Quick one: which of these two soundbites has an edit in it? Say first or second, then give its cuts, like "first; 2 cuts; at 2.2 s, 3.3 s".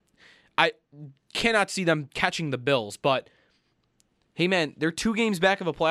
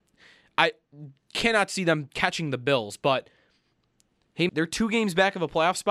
second; 1 cut; at 4.5 s